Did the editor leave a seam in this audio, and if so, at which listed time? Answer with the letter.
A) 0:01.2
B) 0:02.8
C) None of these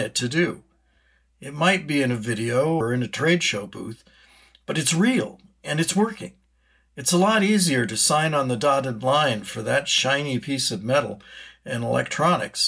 B